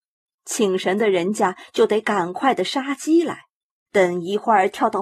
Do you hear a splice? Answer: yes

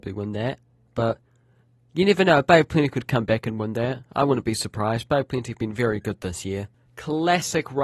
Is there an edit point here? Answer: yes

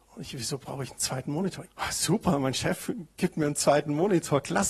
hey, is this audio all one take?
no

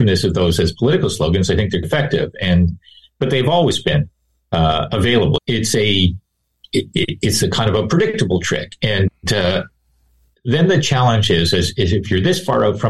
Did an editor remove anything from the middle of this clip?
yes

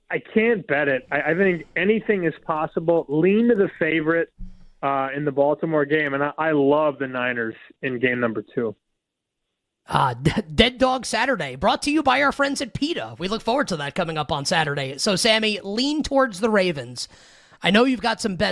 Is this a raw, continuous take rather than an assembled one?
yes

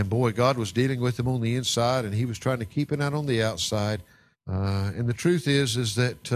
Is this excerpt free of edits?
no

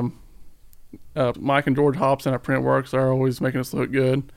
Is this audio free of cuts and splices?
no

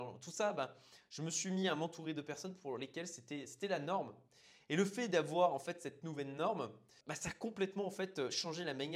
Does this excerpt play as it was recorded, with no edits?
yes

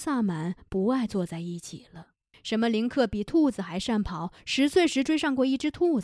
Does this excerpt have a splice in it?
yes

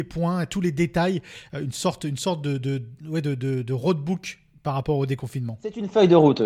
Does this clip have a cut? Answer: no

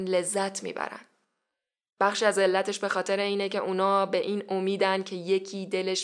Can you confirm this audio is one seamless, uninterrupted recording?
yes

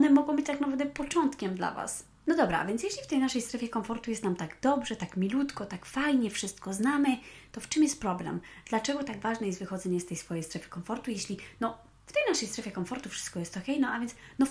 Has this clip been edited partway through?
no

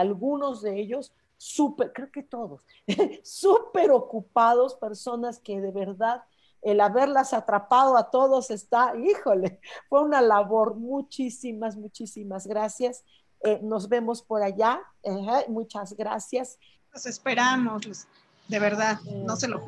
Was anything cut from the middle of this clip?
yes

